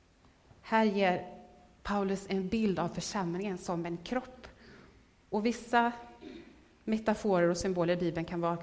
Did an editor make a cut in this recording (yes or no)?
no